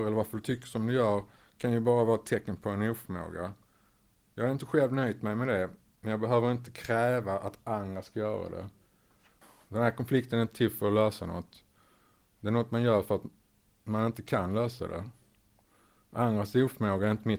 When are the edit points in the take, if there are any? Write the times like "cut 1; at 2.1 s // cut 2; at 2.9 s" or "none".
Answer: none